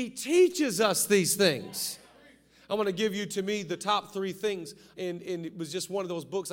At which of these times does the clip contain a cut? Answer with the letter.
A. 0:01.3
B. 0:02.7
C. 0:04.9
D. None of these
C